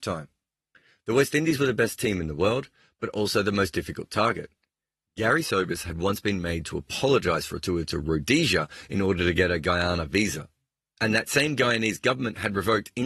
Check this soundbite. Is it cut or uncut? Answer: uncut